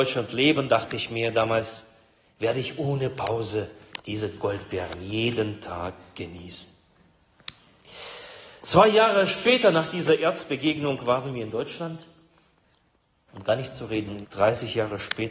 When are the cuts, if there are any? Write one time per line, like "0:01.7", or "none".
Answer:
0:14.2